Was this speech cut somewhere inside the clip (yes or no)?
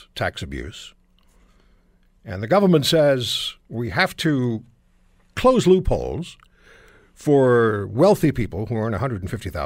yes